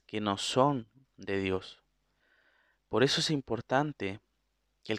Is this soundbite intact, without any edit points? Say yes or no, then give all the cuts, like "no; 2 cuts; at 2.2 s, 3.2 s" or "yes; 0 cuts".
yes; 0 cuts